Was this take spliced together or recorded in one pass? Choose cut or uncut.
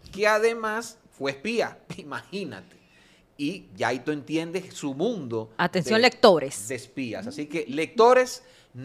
uncut